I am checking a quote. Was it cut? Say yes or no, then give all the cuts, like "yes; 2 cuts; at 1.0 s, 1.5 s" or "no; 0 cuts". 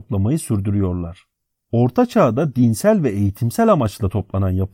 no; 0 cuts